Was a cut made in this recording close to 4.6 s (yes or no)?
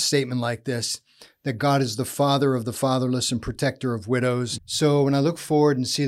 yes